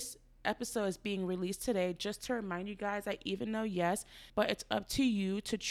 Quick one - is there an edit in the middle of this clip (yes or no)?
yes